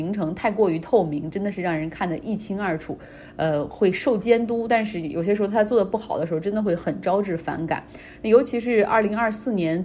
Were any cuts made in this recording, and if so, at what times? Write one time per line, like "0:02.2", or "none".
none